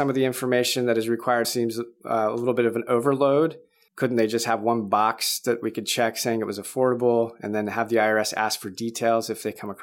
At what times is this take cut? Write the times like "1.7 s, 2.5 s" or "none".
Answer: 1.4 s, 3.9 s